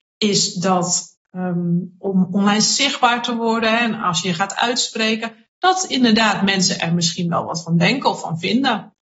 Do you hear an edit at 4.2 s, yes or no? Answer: no